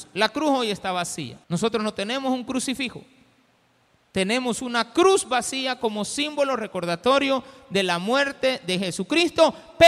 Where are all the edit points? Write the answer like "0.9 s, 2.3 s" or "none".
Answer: 1.4 s